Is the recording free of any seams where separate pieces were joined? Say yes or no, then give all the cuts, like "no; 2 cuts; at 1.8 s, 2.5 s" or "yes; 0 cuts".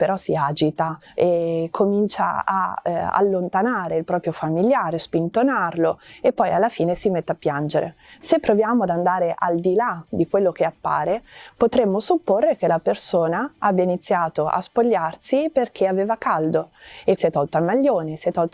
no; 2 cuts; at 8.1 s, 17.2 s